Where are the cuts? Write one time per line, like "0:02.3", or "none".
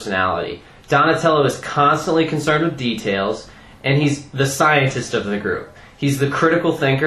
none

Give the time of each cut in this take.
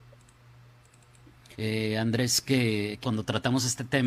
0:01.5
0:03.0

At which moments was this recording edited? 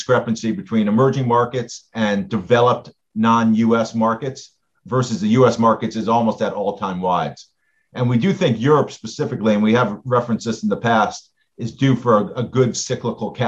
none

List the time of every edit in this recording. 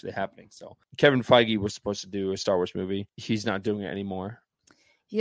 none

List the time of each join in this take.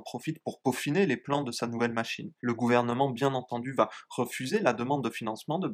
0:02.4

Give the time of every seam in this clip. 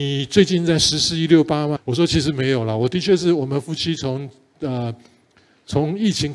0:01.8

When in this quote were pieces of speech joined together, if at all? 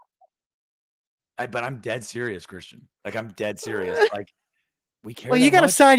0:05.0

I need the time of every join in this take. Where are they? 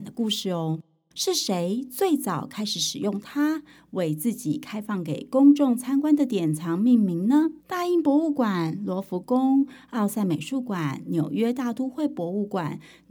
0:01.1
0:07.6

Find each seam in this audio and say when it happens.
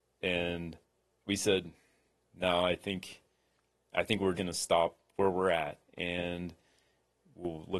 0:04.3
0:05.9

